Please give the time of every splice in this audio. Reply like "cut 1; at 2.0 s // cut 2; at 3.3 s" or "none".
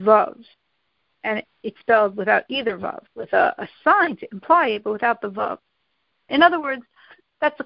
cut 1; at 3.1 s // cut 2; at 6.3 s